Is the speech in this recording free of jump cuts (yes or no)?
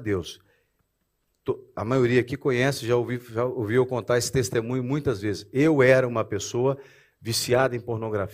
yes